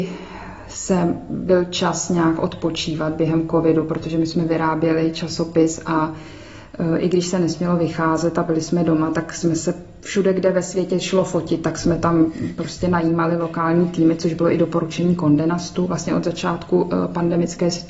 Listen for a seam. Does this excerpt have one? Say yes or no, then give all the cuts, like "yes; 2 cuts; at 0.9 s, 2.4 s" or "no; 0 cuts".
no; 0 cuts